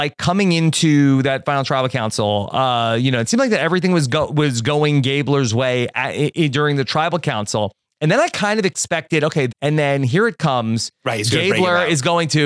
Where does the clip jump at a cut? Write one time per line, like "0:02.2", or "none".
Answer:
0:09.5